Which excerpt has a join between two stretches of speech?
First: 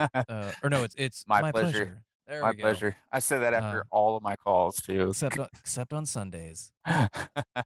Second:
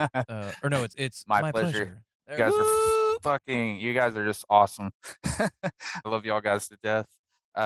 second; 2 cuts; at 2.4 s, 6.0 s

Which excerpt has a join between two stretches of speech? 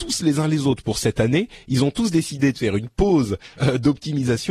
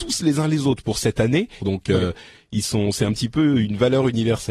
second; 1 cut; at 1.6 s

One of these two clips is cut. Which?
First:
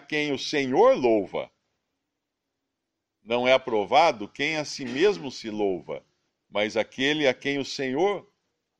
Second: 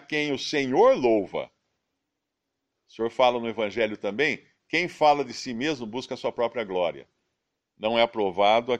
second; 1 cut; at 2.7 s

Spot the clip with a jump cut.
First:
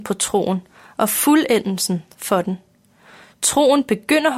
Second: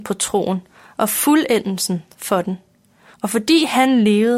second; 1 cut; at 3.1 s

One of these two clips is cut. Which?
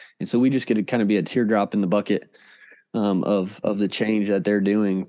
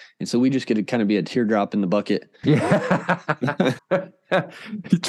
second; 2 cuts; at 2.4 s, 3.8 s

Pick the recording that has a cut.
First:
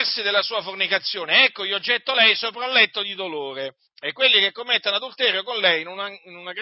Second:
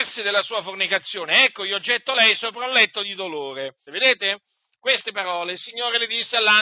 second; 1 cut; at 3.9 s

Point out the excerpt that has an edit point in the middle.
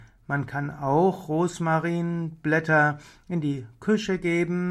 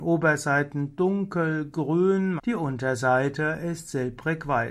second; 1 cut; at 2.4 s

